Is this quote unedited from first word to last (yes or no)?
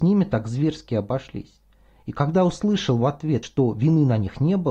yes